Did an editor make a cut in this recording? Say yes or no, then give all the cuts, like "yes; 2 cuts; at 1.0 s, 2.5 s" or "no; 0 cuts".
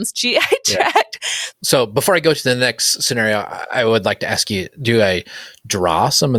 yes; 1 cut; at 1.5 s